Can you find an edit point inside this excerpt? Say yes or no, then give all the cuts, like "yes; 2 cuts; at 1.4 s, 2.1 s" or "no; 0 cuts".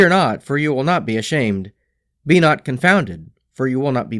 no; 0 cuts